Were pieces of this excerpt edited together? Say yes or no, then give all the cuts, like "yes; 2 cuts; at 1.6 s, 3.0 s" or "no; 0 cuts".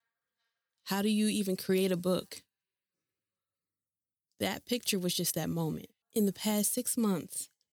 yes; 1 cut; at 6.0 s